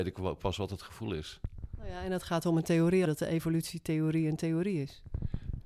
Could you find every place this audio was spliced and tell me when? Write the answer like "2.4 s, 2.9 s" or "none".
3.1 s